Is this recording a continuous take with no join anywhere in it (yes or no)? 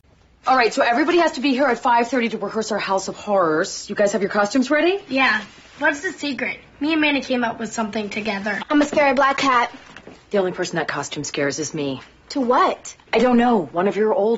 no